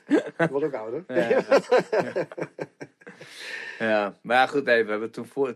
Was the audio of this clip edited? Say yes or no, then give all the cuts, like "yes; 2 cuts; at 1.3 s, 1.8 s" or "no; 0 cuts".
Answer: no; 0 cuts